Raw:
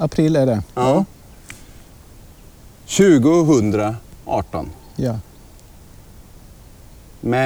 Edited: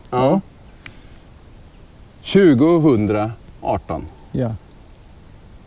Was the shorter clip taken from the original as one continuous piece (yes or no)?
yes